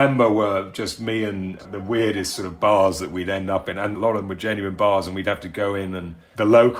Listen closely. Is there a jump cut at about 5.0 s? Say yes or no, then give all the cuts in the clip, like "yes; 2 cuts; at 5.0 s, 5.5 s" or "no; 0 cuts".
no; 1 cut; at 1.6 s